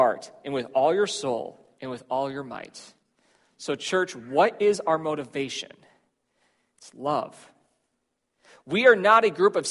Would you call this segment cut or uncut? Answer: uncut